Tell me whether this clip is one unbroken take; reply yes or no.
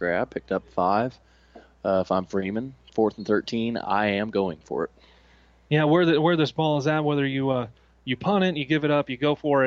yes